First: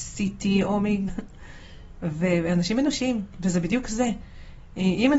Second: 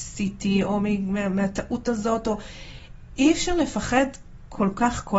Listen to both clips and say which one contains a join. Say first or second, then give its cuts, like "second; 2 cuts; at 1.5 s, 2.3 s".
first; 1 cut; at 1.1 s